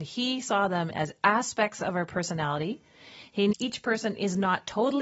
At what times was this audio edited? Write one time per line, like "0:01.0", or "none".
0:03.5